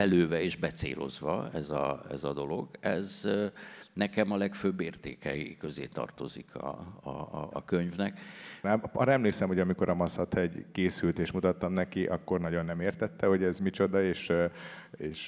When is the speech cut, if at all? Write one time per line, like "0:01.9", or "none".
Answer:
0:08.6